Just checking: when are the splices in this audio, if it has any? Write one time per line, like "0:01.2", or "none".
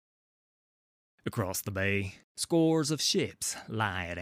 0:02.2